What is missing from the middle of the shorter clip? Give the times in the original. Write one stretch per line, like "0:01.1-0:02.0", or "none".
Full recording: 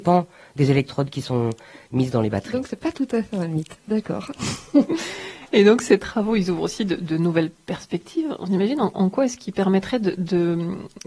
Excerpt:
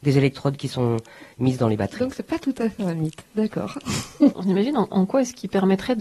0:04.9-0:08.4